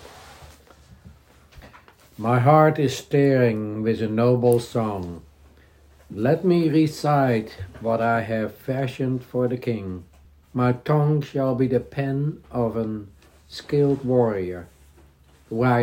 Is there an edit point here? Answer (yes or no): no